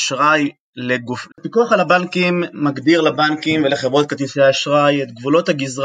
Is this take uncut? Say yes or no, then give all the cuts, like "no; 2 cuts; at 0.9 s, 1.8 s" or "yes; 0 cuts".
no; 1 cut; at 1.3 s